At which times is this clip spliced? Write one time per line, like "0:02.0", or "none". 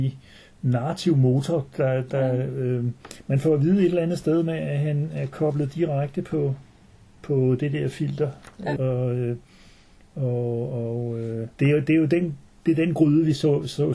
0:08.8
0:11.5